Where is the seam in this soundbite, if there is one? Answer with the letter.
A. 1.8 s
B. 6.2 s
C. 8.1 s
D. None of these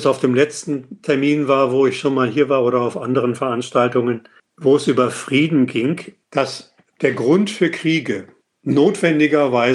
B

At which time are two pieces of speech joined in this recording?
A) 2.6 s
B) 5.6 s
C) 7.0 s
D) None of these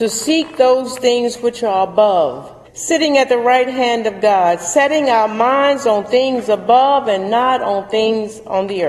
A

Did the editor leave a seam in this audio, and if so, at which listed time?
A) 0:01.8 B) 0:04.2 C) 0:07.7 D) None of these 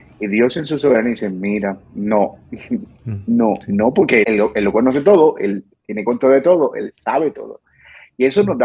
B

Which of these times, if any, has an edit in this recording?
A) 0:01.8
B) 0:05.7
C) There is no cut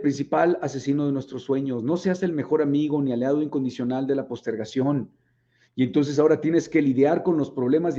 B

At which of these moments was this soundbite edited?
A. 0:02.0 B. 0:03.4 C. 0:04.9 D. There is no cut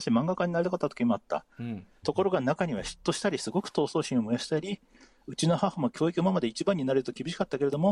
A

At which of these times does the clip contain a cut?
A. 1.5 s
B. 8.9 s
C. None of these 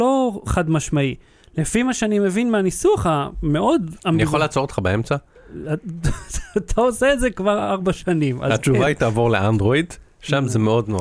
C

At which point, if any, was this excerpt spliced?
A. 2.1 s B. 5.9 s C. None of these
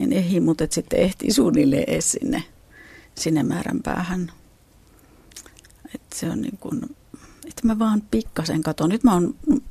C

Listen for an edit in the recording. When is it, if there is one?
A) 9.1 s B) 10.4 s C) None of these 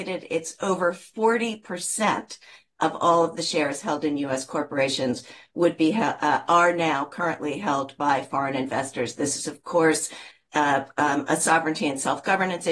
C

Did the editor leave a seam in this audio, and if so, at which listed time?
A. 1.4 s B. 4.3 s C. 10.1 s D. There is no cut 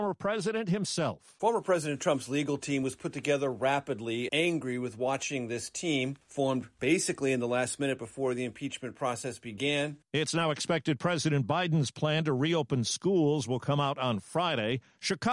B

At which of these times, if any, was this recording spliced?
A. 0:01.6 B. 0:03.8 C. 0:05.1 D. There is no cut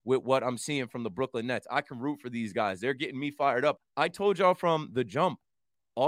B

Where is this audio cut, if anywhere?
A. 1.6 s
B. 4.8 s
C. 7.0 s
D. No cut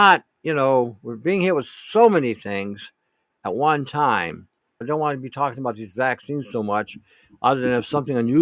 B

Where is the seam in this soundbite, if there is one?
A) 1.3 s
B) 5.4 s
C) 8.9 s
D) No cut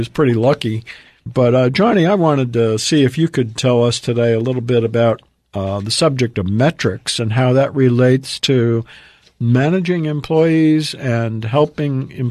A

